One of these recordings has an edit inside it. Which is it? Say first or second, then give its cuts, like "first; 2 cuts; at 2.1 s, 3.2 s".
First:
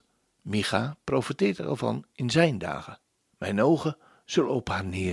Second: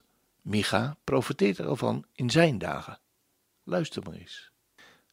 first; 1 cut; at 3.3 s